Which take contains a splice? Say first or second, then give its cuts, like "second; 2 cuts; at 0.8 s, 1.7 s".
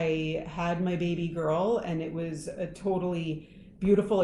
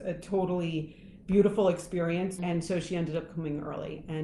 second; 1 cut; at 2.4 s